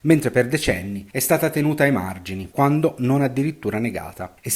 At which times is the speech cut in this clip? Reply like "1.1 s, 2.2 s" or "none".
2.5 s